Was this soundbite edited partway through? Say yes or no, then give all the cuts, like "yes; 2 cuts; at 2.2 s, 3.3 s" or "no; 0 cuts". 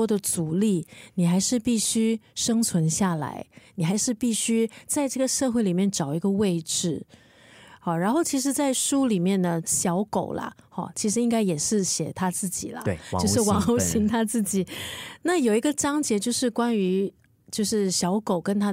yes; 1 cut; at 9.6 s